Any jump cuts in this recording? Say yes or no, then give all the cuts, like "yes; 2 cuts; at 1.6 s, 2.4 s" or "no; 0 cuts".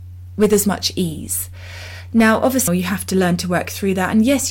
yes; 1 cut; at 2.7 s